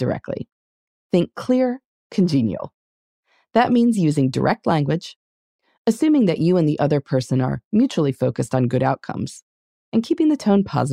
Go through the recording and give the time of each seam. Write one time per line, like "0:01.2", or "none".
0:01.9